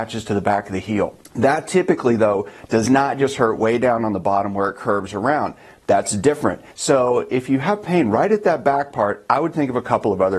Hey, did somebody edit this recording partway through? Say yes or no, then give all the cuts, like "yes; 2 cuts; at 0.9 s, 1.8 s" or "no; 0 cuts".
yes; 1 cut; at 6.7 s